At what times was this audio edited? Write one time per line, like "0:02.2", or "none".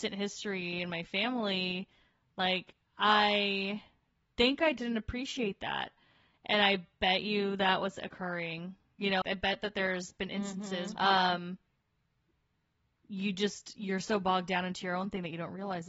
0:09.2
0:10.9